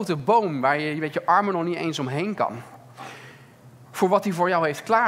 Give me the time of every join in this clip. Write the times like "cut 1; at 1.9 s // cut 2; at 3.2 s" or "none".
cut 1; at 3.8 s